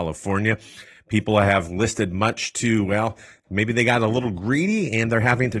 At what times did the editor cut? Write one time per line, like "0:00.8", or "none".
none